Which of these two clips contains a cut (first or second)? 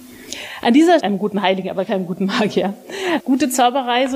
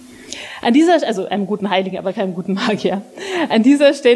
first